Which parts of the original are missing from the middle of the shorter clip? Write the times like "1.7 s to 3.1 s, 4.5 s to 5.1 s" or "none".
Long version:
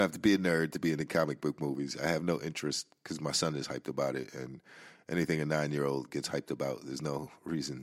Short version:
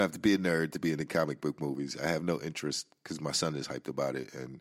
none